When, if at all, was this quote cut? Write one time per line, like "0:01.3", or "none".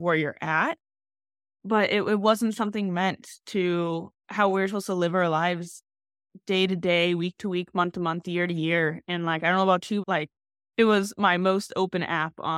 0:10.0